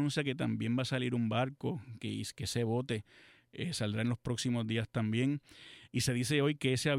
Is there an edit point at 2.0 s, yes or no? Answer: no